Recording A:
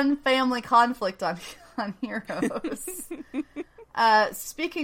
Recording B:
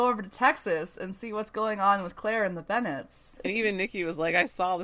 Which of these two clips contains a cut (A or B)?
B